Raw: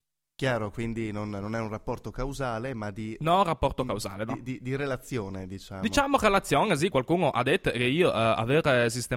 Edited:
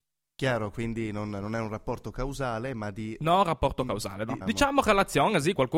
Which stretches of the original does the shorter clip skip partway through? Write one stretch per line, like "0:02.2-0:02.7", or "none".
0:04.4-0:05.8